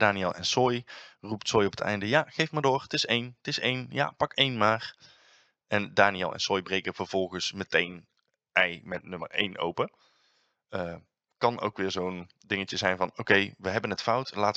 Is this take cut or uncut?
uncut